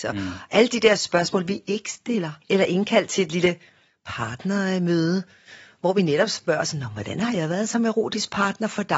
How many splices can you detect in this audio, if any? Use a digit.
1